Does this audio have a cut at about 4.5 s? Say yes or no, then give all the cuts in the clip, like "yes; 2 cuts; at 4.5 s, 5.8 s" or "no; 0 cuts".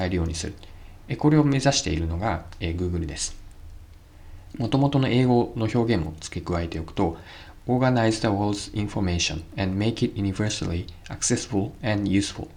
yes; 1 cut; at 4.5 s